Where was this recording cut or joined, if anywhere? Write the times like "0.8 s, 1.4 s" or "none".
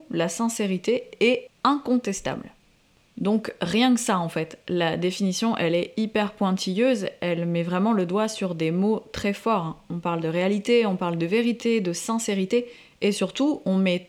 none